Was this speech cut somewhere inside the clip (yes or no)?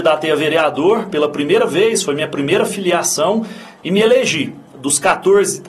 no